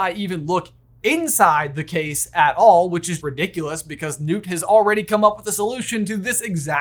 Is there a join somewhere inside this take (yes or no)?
yes